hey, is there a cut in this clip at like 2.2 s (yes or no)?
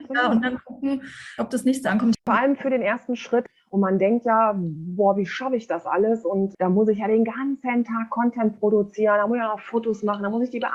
yes